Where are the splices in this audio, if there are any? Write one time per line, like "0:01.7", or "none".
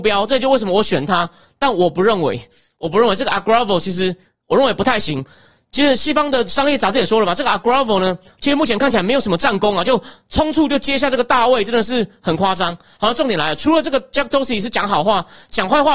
none